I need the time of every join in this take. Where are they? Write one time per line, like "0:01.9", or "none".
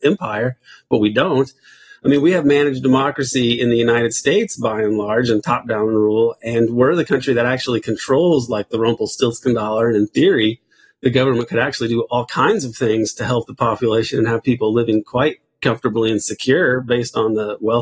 0:01.9